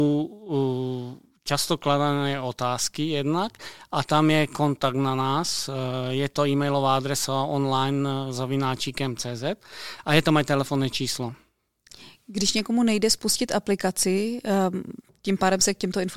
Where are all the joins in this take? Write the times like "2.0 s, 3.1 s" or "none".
none